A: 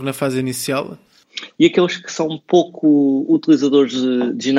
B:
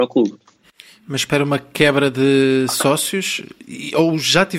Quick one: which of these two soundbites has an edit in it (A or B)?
A